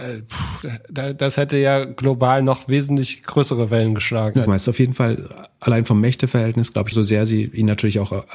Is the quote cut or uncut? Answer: cut